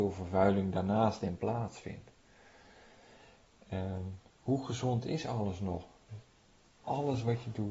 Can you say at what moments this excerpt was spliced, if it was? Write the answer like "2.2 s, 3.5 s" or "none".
4.3 s

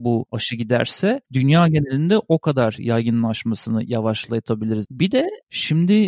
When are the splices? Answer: 4.8 s

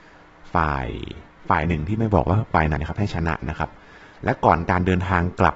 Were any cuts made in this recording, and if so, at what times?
2.8 s

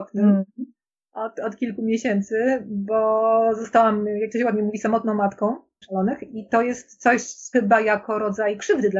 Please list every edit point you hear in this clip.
5.8 s, 7.5 s

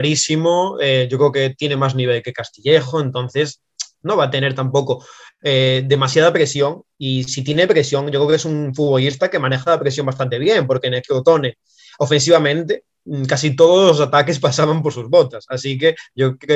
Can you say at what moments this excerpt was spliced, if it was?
none

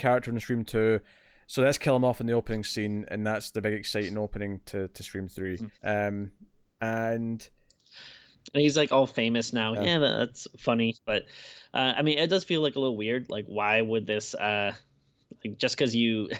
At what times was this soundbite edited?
5.7 s, 9.7 s

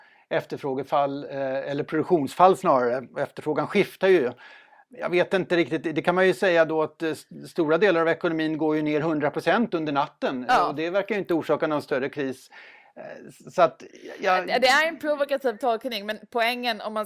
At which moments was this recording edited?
none

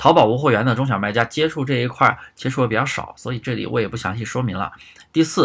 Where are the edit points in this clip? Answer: none

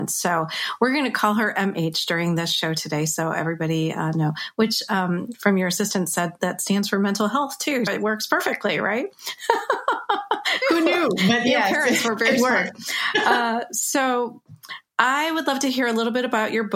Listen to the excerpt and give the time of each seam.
7.9 s, 10.6 s

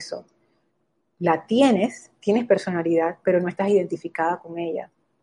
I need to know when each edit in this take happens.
none

